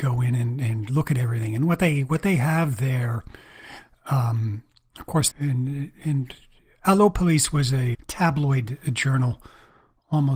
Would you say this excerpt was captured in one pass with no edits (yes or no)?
no